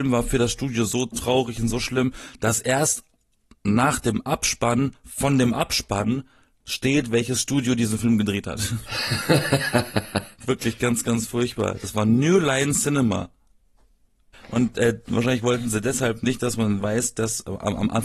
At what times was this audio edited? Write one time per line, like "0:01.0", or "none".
0:14.3